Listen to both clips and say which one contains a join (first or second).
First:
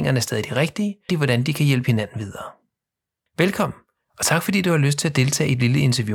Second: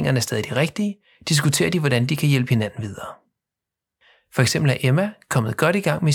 first